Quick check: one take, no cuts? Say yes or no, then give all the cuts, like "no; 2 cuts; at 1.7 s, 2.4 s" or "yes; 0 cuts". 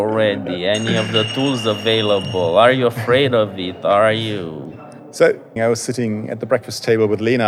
no; 1 cut; at 5.6 s